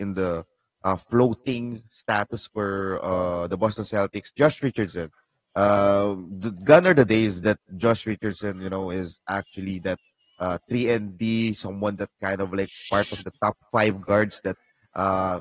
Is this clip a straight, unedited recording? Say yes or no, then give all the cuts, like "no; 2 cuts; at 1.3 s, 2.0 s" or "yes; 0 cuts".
yes; 0 cuts